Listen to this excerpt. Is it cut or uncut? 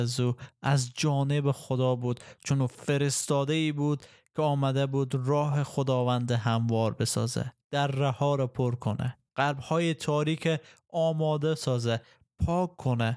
cut